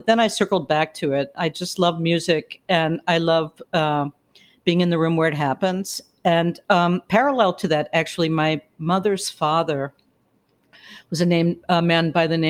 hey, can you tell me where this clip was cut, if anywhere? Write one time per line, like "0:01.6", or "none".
none